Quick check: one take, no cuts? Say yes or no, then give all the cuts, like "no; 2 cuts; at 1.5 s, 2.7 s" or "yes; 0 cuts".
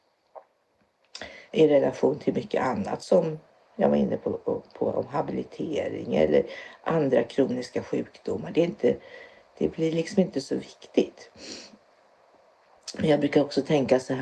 no; 1 cut; at 1.5 s